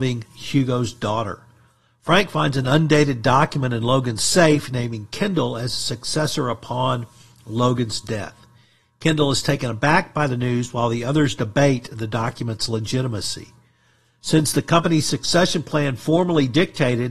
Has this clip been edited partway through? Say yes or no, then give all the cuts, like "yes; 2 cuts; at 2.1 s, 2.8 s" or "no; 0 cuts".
no; 0 cuts